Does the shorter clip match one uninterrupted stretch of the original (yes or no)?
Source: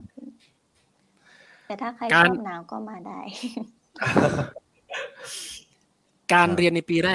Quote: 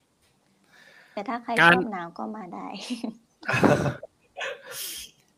yes